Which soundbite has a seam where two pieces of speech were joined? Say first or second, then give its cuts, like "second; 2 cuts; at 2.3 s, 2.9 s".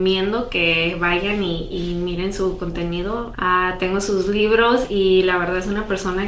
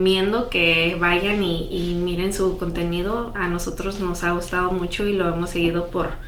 first; 1 cut; at 3.3 s